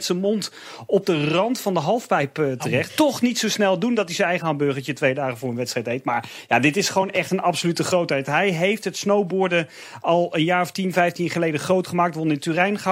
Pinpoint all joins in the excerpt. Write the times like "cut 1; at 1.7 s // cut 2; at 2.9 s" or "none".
cut 1; at 2.9 s

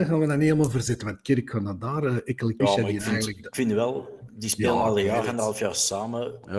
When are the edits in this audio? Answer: cut 1; at 2.6 s

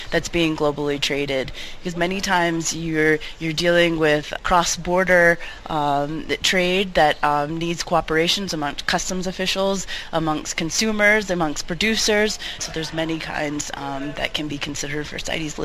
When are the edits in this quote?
cut 1; at 4.4 s // cut 2; at 12.6 s

